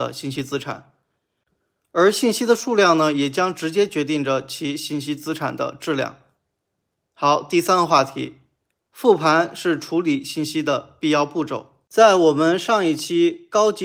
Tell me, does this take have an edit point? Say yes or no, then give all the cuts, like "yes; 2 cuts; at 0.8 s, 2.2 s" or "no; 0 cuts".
no; 0 cuts